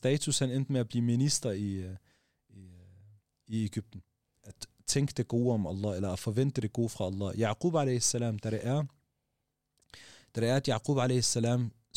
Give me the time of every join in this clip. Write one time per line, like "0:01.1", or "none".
0:04.4